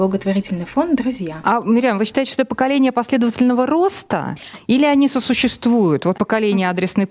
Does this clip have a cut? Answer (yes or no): yes